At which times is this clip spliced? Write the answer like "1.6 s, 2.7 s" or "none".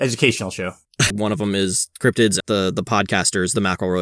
1.1 s, 2.4 s